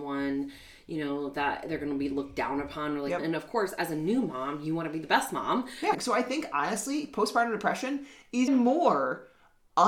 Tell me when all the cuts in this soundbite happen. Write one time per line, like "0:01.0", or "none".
0:03.2
0:05.9
0:08.5